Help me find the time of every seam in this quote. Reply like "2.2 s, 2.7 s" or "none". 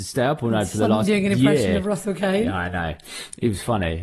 none